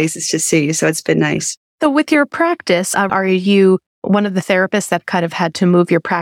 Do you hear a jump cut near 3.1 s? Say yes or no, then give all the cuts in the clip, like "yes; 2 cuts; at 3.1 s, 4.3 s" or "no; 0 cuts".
yes; 2 cuts; at 1.6 s, 3.1 s